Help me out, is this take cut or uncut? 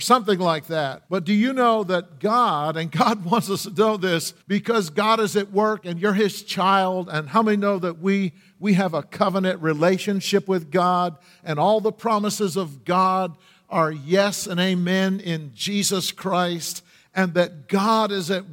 cut